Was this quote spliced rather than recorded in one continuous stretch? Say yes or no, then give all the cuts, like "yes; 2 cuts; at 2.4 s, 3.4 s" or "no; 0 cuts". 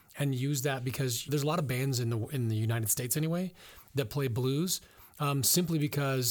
yes; 1 cut; at 1.3 s